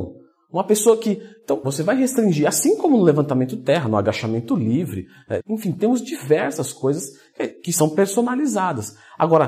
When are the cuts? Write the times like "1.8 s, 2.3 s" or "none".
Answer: 1.6 s, 5.4 s